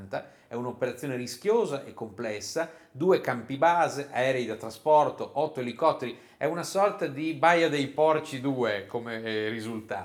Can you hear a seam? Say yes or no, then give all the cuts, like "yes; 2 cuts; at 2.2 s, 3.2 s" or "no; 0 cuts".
no; 0 cuts